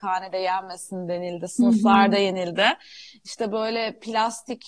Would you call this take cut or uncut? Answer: uncut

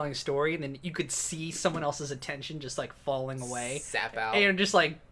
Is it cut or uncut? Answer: uncut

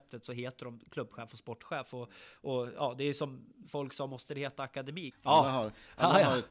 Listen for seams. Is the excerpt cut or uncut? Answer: cut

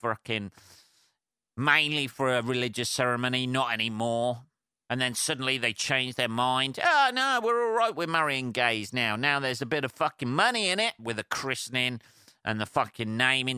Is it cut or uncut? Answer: cut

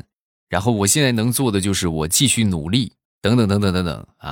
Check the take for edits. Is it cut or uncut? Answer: cut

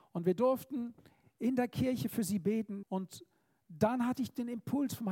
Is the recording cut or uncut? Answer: cut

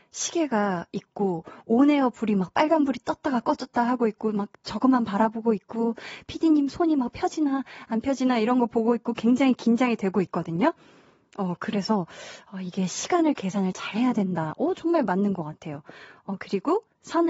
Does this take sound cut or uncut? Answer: uncut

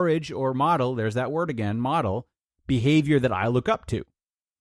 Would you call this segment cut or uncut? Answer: uncut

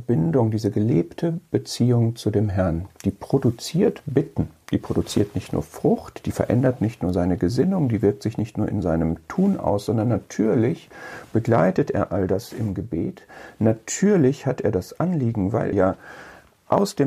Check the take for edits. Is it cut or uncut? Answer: cut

